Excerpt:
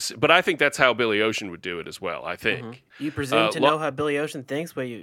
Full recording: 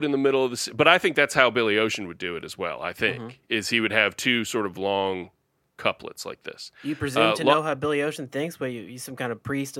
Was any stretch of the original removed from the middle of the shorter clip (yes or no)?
yes